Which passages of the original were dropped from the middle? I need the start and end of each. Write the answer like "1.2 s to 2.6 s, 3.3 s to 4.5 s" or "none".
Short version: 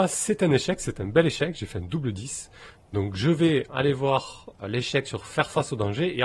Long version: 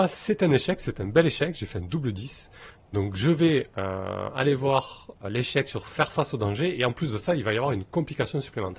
3.7 s to 4.3 s